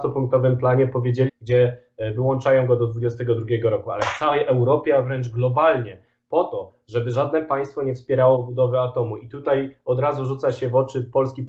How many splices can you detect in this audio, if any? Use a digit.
1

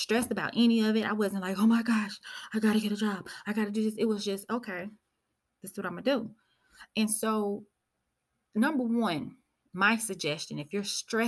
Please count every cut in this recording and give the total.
0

